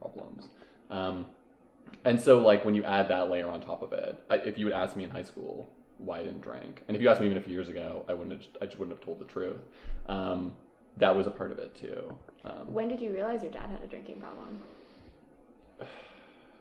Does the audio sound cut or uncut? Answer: cut